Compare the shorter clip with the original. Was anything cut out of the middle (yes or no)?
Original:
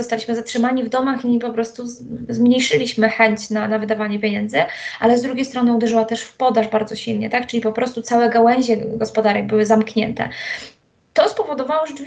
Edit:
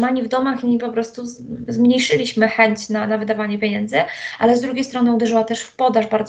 no